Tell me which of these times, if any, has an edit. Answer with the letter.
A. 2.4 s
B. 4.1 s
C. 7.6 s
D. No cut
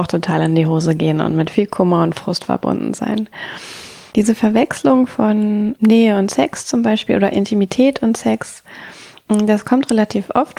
B